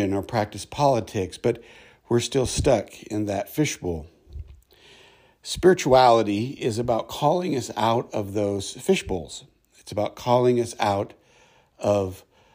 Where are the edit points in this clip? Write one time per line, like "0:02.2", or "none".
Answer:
none